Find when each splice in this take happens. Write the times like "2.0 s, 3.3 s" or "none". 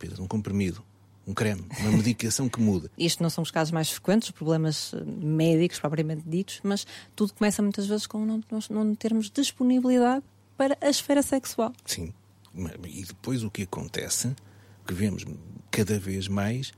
3.0 s